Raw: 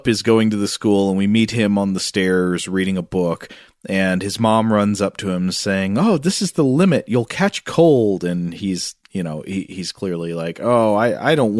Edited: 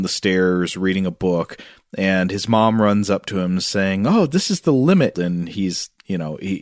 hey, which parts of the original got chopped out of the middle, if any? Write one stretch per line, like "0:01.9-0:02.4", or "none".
0:07.1-0:08.2